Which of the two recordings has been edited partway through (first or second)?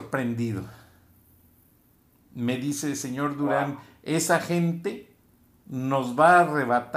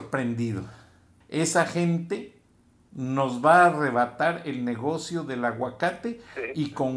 second